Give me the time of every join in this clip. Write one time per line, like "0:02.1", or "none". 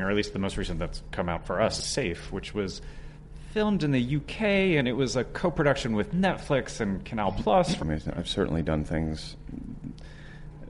0:01.8
0:07.8

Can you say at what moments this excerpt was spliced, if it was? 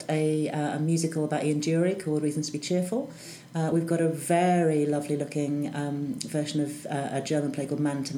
none

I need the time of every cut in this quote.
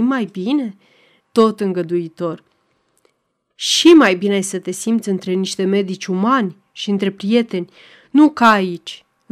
0:01.2

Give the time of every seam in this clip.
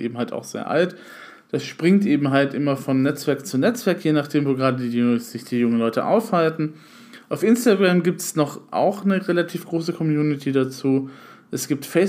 none

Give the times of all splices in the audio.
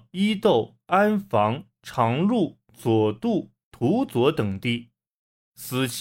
0:03.6

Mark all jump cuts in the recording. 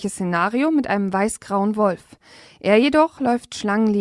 none

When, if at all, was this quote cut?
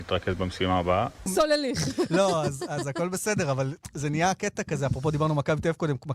0:01.3

